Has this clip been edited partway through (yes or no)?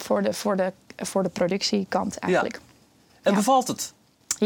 no